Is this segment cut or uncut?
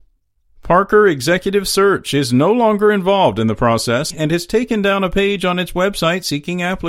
cut